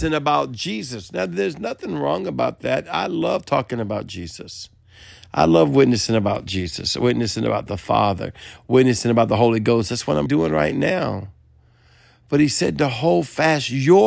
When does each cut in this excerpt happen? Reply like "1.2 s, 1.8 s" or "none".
10.3 s